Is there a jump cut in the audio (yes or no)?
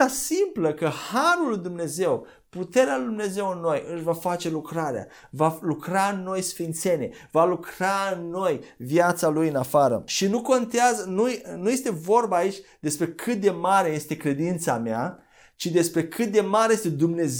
no